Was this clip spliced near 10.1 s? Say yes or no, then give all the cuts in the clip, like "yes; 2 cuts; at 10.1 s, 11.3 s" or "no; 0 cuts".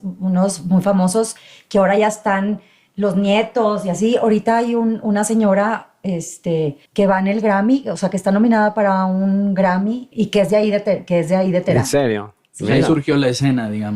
yes; 2 cuts; at 6.9 s, 10.1 s